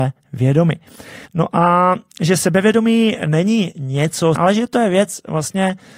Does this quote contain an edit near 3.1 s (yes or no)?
no